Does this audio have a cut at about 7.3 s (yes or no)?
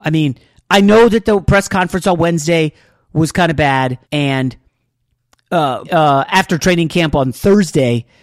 no